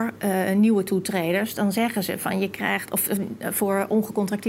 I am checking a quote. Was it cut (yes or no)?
no